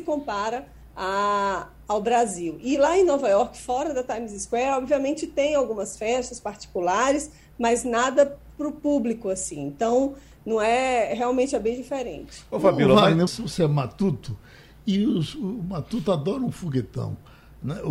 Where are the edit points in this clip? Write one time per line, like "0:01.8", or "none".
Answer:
0:13.3